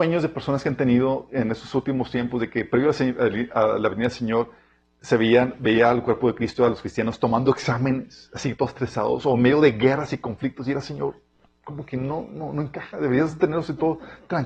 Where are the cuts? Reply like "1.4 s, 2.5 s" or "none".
none